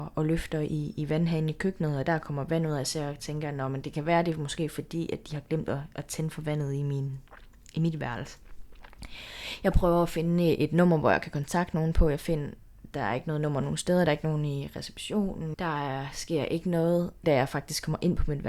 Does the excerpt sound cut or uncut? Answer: cut